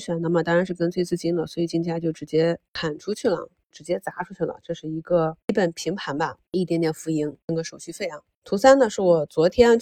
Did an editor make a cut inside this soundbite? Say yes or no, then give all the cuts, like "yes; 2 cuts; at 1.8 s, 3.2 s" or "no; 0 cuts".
no; 0 cuts